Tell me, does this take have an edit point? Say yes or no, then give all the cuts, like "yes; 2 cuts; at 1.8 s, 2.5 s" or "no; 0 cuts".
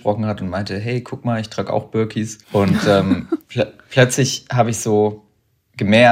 yes; 1 cut; at 2.4 s